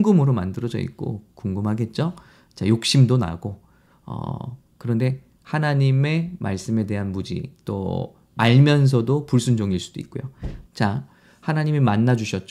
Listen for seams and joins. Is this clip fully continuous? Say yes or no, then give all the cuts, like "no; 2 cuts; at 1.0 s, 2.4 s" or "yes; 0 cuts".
no; 1 cut; at 10.7 s